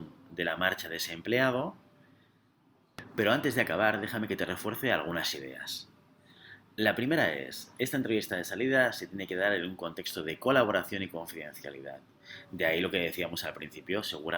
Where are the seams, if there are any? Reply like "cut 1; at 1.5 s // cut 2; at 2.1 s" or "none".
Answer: none